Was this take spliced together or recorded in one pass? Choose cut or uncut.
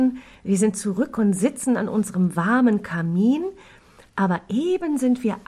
uncut